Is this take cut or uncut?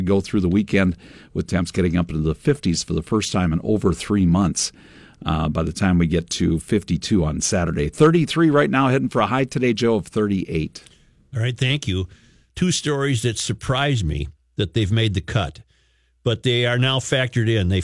cut